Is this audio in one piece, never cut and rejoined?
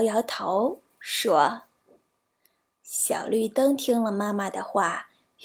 no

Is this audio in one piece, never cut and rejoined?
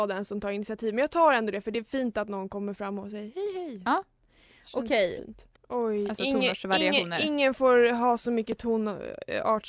no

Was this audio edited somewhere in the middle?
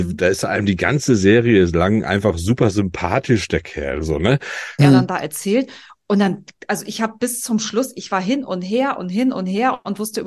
yes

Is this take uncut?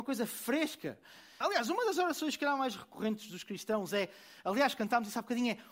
no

